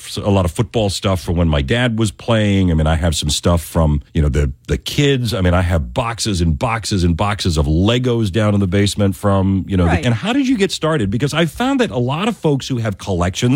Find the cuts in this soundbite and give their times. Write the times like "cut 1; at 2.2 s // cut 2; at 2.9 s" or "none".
cut 1; at 4.1 s // cut 2; at 10.0 s